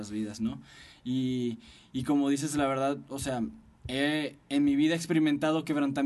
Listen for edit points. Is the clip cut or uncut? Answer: uncut